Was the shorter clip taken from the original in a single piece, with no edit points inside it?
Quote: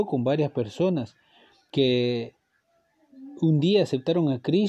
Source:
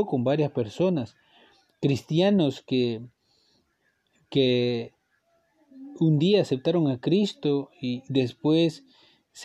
no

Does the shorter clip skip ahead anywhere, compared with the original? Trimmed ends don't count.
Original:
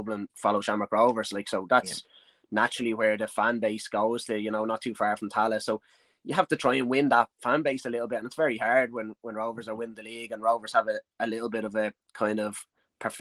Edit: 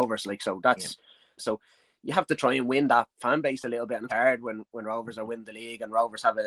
yes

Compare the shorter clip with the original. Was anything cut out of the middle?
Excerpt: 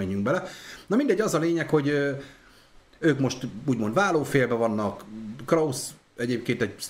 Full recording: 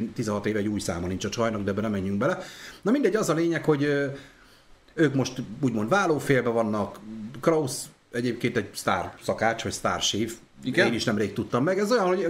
no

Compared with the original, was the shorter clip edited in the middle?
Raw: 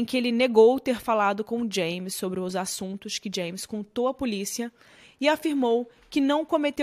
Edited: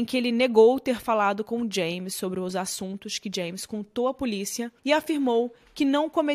yes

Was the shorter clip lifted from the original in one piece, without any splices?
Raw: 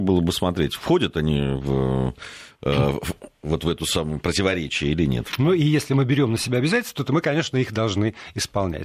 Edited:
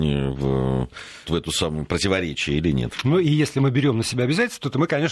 no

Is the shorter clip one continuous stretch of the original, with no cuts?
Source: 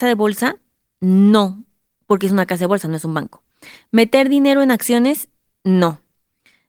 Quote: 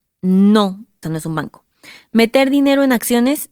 no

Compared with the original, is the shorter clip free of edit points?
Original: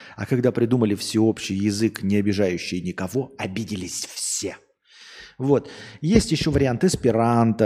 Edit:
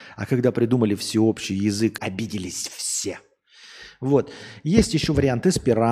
no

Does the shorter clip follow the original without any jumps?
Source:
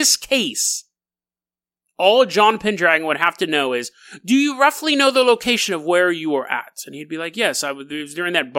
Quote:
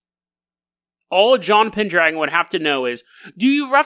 yes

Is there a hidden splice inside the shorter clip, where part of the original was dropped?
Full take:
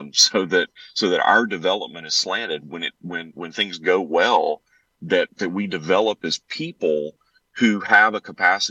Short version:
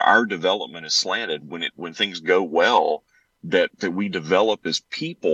yes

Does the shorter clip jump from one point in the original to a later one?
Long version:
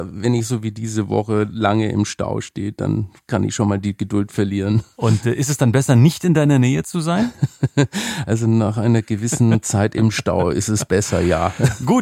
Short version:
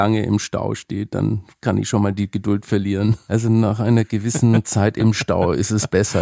yes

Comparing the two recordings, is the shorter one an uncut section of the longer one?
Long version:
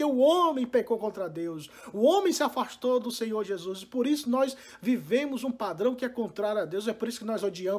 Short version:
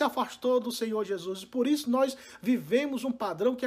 yes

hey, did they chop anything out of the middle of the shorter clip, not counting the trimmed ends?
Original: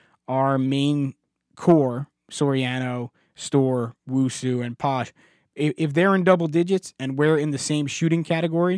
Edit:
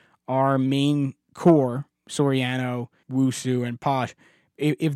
yes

